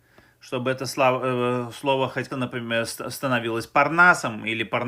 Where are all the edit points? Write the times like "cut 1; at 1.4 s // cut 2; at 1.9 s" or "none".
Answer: cut 1; at 2.3 s